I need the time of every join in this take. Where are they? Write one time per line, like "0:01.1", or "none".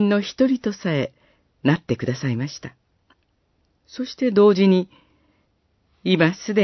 0:03.7